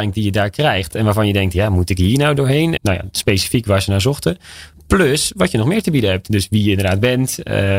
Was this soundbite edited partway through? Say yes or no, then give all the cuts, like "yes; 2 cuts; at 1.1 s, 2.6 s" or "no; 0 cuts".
yes; 2 cuts; at 0.9 s, 2.8 s